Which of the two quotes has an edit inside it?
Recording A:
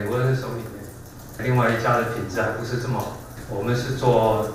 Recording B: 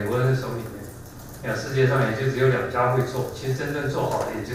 A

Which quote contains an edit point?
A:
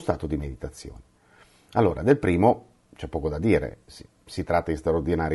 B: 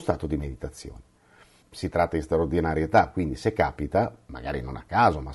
B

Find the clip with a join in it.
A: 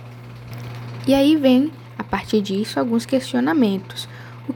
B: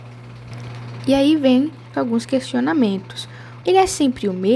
B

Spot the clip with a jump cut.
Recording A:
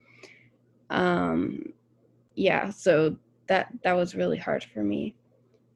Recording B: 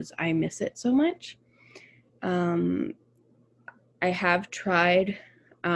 B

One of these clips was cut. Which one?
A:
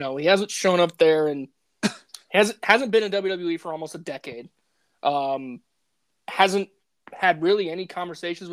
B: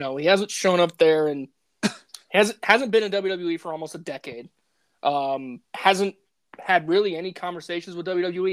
B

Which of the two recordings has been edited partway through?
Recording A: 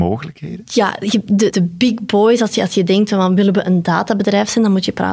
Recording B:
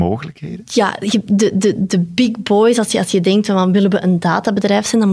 A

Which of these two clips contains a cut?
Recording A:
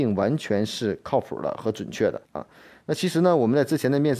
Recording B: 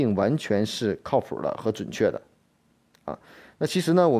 A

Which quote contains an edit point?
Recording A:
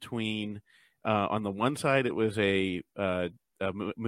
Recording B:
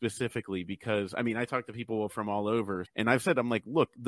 B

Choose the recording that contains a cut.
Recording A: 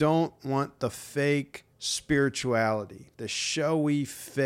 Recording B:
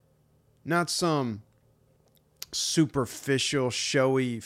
A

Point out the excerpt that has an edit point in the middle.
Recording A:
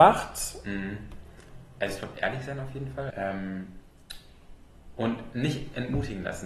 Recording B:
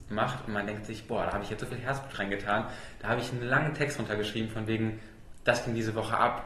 A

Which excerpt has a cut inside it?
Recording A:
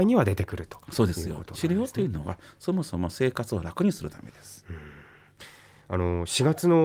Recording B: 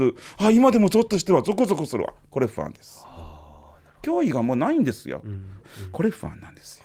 B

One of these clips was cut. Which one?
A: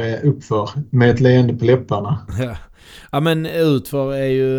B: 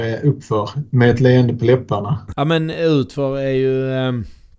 B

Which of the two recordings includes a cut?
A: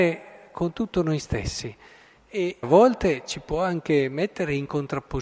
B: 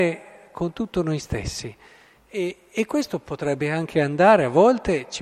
A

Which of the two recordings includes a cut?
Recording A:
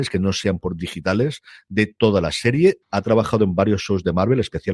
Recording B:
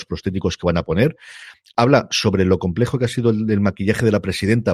A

